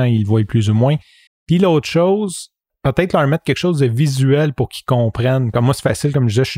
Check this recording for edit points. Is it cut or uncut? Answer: cut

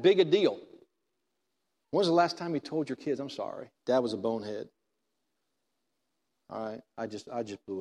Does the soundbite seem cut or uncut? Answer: cut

